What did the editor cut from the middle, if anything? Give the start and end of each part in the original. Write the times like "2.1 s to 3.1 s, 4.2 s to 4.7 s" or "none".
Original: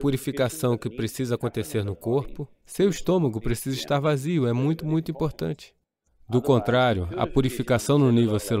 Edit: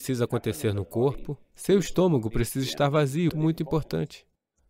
4.4 s to 4.8 s